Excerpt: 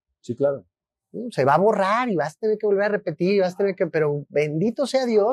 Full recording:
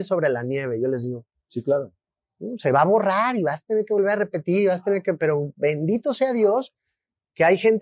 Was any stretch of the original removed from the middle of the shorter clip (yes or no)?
no